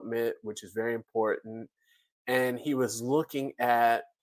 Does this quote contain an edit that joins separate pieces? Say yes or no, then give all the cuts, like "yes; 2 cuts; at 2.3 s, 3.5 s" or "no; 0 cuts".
no; 0 cuts